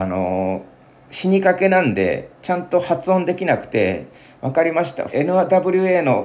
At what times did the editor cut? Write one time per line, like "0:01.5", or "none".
0:05.1